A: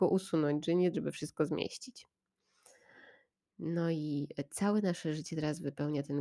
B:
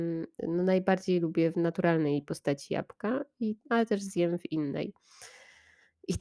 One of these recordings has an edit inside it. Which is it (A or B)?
A